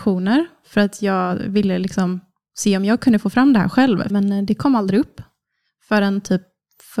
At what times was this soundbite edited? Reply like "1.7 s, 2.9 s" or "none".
4.1 s